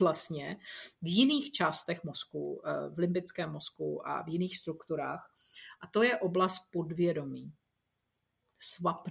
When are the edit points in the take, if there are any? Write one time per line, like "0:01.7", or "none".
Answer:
none